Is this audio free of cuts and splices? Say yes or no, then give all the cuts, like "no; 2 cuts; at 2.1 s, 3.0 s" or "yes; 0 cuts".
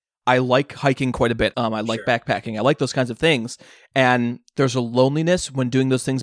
no; 1 cut; at 1.5 s